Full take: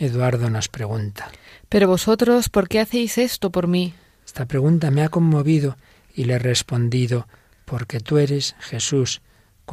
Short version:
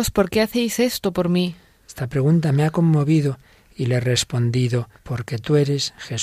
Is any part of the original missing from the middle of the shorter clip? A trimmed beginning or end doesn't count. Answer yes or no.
yes